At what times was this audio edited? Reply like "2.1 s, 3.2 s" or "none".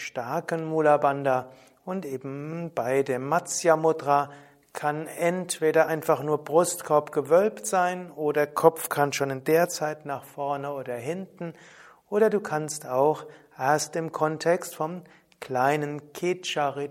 none